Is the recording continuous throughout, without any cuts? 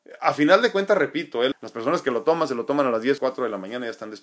no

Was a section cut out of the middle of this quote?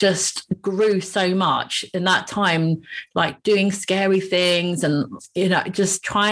no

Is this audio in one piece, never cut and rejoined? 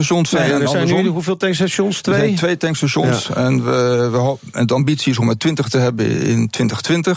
yes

